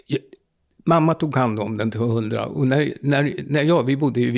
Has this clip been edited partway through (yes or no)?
no